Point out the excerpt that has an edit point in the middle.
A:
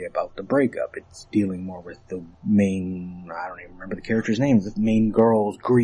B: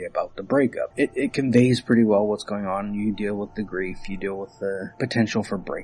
B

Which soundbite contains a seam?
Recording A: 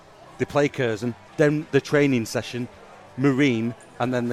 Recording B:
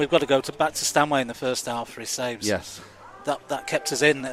A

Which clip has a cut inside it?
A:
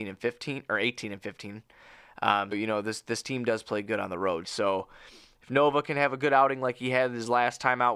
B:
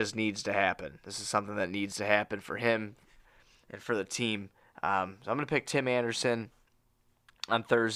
A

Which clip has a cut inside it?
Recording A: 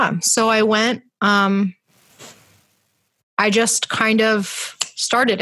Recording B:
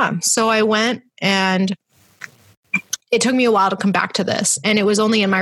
B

